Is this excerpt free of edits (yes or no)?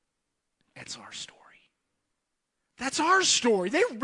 yes